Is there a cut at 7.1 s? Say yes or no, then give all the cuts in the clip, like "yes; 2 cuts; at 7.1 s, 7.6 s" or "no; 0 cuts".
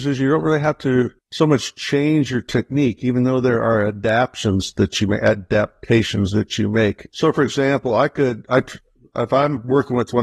yes; 1 cut; at 7.1 s